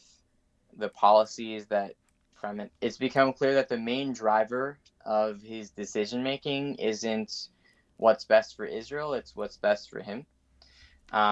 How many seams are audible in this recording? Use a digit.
1